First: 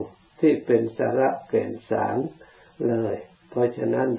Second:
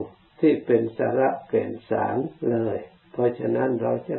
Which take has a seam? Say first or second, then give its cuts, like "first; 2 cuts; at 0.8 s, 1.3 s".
second; 1 cut; at 2.4 s